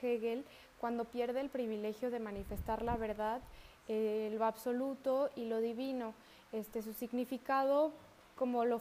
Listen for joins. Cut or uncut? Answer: uncut